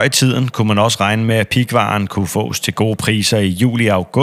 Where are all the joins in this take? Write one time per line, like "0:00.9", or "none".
none